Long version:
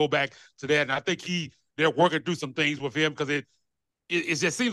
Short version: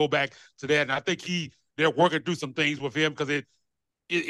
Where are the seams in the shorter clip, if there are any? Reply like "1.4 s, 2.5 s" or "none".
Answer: none